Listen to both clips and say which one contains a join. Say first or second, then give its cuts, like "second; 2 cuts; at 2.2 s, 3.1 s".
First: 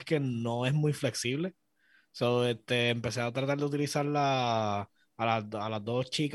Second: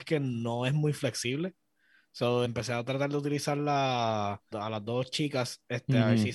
second; 2 cuts; at 2.4 s, 4.5 s